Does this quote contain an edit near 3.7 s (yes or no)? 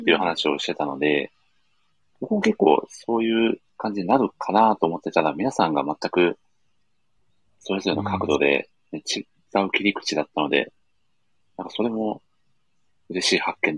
yes